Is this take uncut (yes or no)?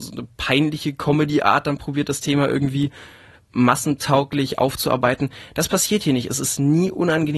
yes